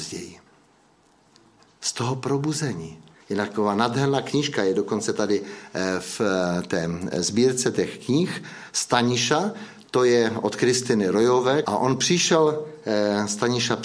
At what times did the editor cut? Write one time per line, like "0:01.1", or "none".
0:03.1
0:11.6